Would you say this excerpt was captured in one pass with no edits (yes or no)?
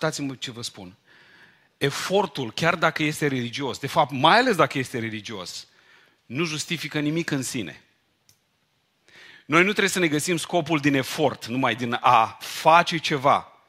yes